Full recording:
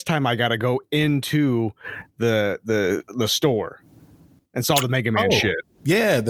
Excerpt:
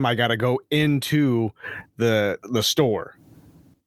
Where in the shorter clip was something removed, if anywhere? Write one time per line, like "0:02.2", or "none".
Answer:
0:02.4

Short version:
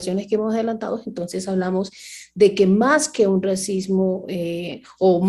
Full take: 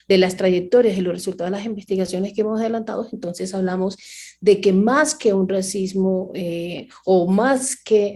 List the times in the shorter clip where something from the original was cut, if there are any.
none

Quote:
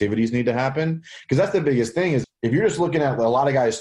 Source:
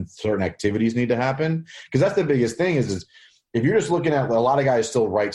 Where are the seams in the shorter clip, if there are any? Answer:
0:02.2

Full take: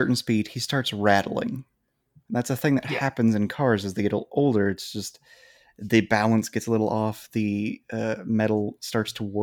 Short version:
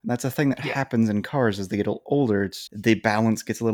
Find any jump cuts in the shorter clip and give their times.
0:02.7

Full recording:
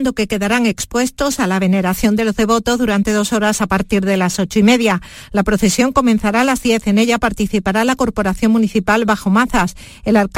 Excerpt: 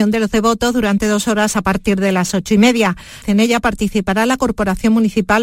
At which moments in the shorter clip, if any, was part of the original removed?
0:03.2

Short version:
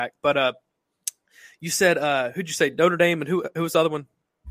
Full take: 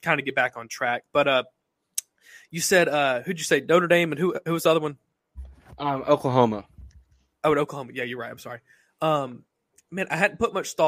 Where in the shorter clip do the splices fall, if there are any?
none

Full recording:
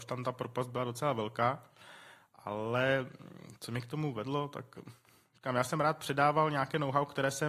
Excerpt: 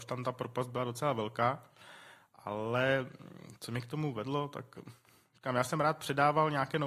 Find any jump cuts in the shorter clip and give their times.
none

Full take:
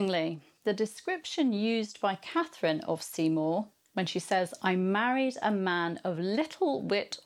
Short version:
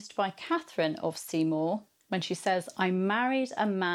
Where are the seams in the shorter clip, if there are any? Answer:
none

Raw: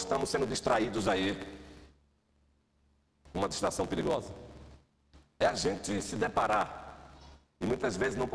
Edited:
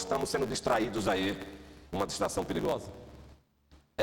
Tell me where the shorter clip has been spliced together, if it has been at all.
0:01.9

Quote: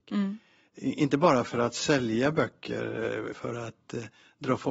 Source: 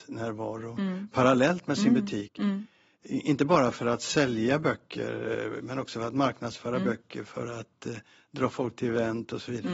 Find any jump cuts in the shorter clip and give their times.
0:03.3

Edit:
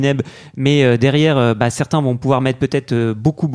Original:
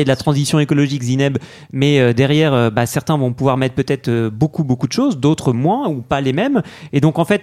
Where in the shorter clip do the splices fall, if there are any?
none

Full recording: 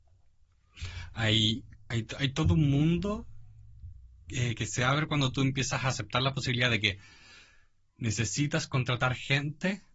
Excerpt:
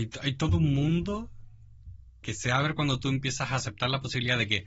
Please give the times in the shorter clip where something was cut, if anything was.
0:02.2

